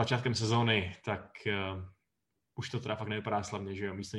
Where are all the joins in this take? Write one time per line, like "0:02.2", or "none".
none